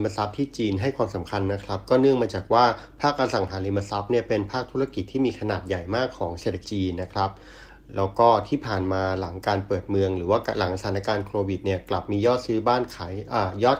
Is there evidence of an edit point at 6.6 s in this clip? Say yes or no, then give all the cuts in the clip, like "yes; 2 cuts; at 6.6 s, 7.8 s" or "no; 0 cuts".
yes; 1 cut; at 6.6 s